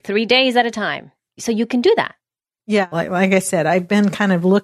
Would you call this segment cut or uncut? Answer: cut